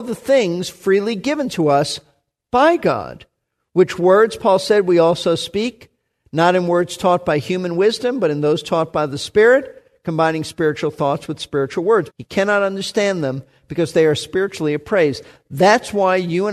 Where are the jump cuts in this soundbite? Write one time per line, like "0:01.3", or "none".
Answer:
0:12.1

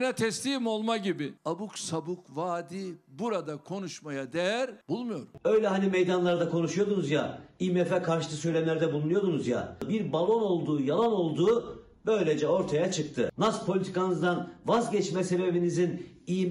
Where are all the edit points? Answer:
none

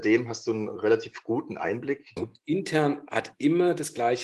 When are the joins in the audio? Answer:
0:02.2

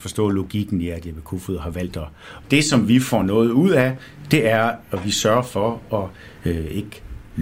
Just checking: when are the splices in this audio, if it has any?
0:02.4

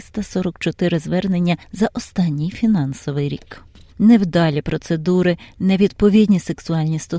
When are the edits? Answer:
0:03.9

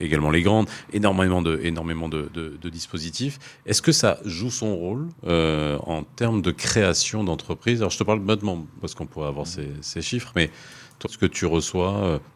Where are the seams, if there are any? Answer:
0:05.2
0:08.8
0:11.0

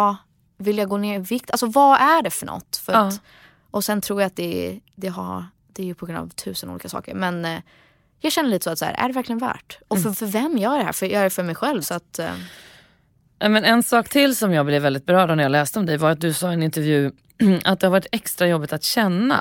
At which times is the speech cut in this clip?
0:10.1
0:11.8

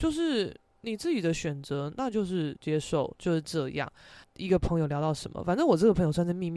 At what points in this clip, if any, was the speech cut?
0:04.2

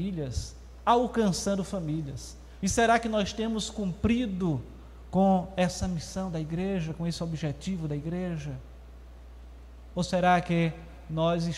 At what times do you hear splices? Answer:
0:02.6

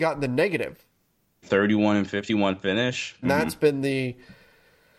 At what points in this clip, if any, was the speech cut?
0:01.4
0:03.2

